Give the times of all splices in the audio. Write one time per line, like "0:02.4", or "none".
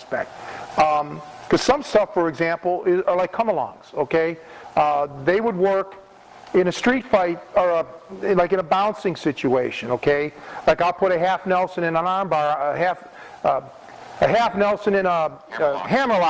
none